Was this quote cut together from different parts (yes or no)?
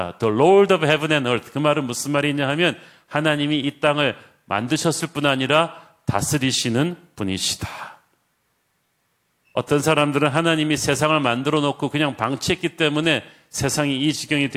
no